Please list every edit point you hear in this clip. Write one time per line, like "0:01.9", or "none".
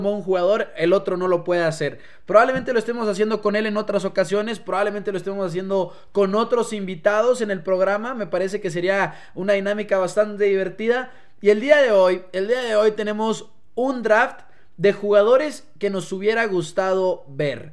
none